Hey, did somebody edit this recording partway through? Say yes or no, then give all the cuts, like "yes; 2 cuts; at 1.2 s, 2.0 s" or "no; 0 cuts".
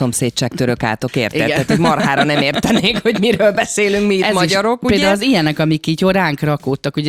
no; 0 cuts